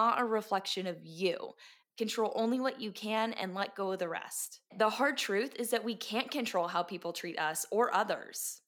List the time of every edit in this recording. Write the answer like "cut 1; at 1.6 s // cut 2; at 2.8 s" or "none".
cut 1; at 1.8 s // cut 2; at 4.7 s